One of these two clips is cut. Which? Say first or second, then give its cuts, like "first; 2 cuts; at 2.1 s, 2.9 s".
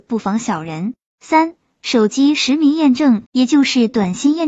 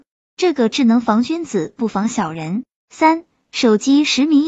first; 1 cut; at 3.2 s